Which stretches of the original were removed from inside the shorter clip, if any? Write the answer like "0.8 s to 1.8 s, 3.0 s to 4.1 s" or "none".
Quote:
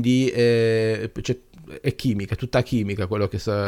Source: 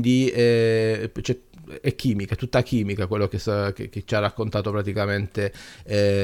none